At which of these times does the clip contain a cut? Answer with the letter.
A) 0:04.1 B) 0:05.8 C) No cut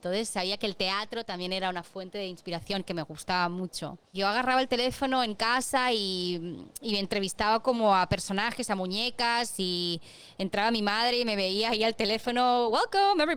A